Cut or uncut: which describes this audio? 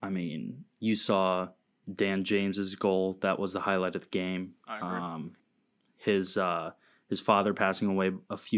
uncut